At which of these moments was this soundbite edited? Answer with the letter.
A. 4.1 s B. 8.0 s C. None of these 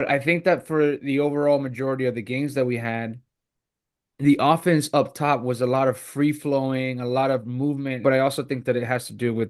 B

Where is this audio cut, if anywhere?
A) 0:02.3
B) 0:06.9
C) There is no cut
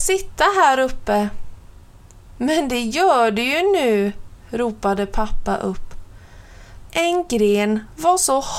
B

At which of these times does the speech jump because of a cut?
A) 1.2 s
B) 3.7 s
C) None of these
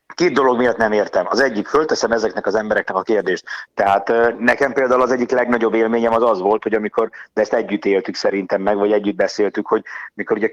B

